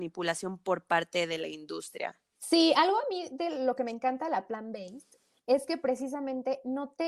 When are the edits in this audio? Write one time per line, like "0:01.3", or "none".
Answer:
0:02.3